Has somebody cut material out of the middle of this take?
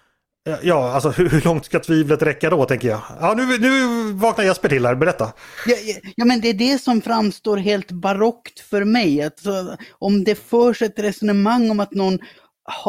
no; 0 cuts

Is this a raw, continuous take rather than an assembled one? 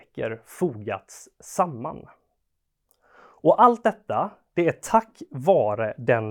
yes; 0 cuts

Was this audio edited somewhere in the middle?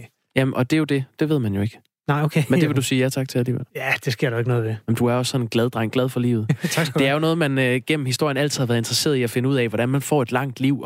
no; 0 cuts

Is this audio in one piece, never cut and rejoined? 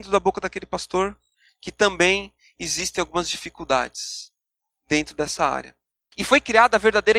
yes; 0 cuts

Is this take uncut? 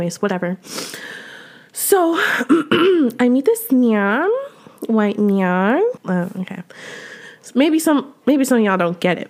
no; 1 cut; at 6.0 s

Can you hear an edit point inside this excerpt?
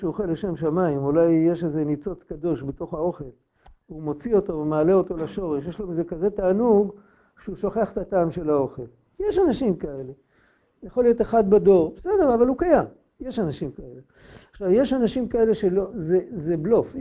no; 0 cuts

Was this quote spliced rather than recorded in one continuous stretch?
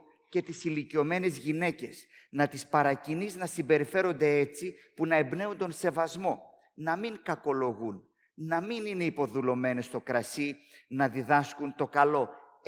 no; 0 cuts

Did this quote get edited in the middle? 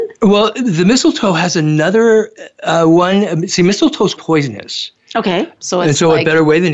yes; 2 cuts; at 4.2 s, 5.6 s

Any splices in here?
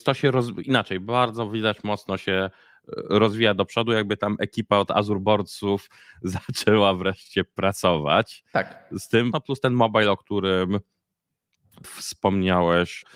yes; 1 cut; at 9.3 s

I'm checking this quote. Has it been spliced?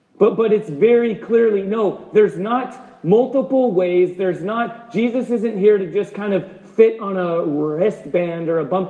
no; 0 cuts

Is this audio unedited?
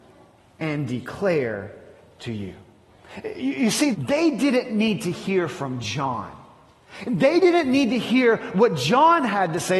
no; 1 cut; at 3.9 s

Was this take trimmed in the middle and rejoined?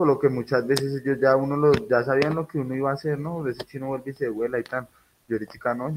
no; 0 cuts

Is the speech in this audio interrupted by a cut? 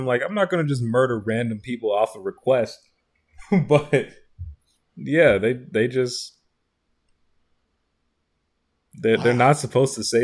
no; 0 cuts

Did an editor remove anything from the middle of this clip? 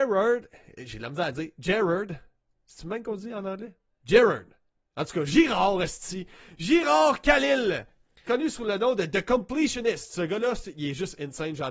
yes; 1 cut; at 8.3 s

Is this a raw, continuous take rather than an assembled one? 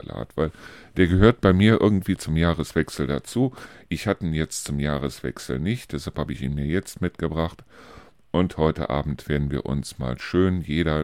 yes; 0 cuts

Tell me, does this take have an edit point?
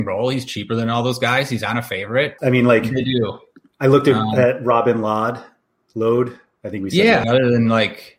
yes; 2 cuts; at 2.4 s, 7.2 s

